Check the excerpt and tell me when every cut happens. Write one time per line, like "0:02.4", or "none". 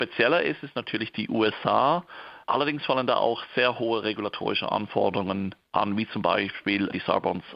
0:02.4